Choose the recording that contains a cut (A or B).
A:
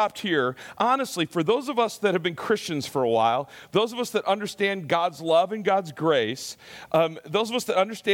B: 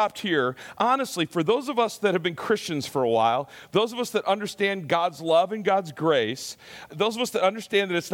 B